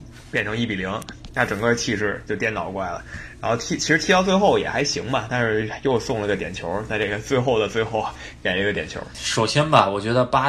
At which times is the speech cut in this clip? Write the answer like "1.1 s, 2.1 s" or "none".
none

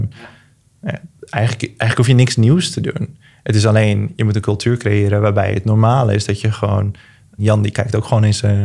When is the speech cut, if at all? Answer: 7.4 s

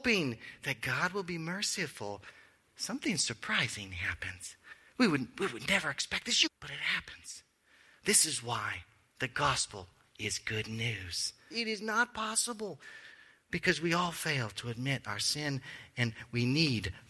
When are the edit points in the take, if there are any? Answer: 6.5 s, 11.5 s

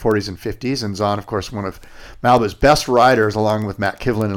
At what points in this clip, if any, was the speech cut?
none

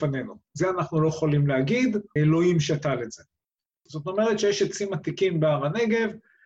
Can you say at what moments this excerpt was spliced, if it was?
2.2 s, 3.8 s

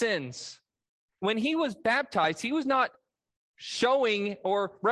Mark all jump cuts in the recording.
1.2 s

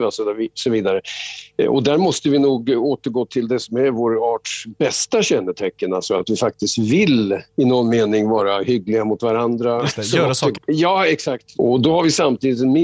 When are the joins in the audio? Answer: 7.5 s, 10.5 s, 11.5 s

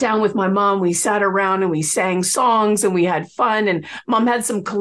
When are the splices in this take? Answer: none

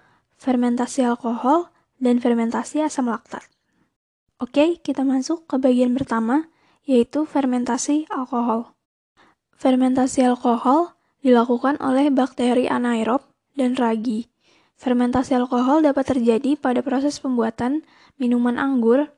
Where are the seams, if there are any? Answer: none

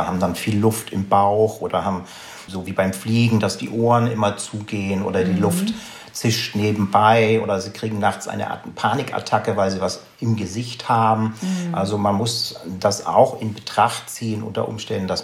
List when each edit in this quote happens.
2.5 s

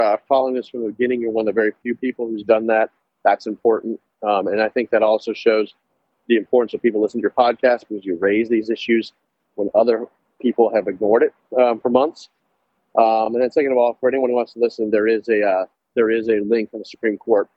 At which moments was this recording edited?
none

